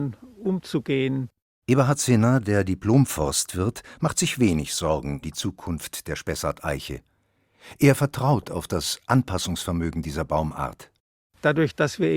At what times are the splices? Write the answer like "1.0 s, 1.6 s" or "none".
5.2 s